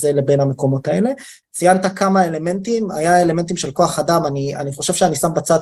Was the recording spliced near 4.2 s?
no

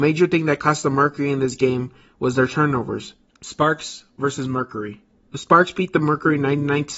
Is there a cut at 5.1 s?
yes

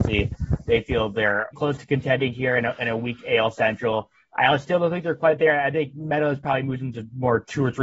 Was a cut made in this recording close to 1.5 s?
yes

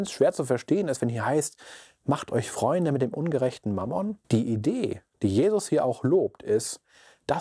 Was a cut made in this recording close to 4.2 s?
yes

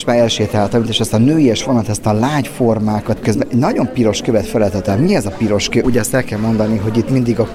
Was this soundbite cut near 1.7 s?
no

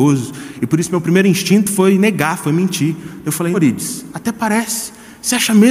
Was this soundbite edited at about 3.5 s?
yes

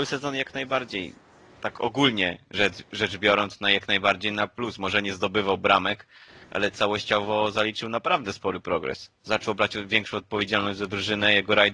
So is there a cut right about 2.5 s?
no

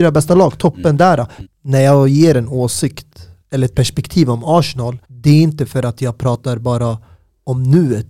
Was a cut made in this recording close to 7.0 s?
no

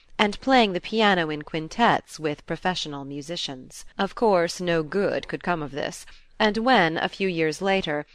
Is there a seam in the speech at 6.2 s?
no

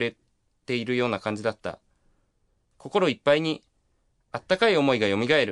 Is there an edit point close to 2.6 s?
yes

